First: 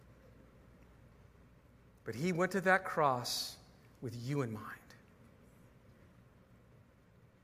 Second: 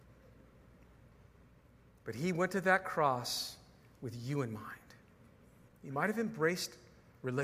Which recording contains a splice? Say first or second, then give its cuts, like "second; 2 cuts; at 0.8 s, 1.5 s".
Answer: second; 1 cut; at 5.7 s